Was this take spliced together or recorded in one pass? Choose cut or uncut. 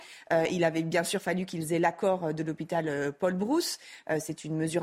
uncut